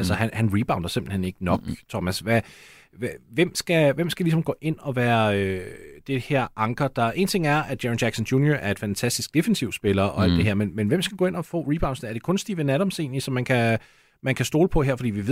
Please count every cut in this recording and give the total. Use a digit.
0